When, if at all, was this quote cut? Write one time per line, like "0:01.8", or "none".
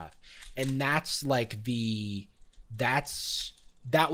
none